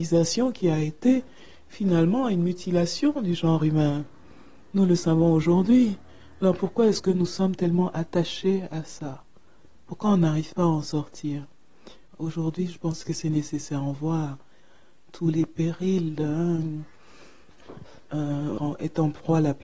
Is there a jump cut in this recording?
yes; 1 cut; at 18.6 s

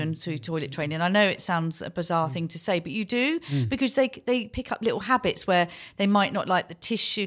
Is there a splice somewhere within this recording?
no; 0 cuts

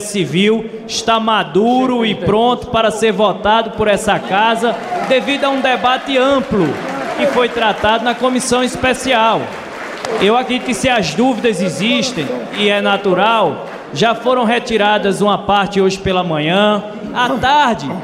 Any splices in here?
no; 0 cuts

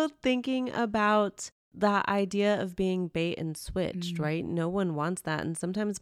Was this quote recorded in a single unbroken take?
yes; 0 cuts

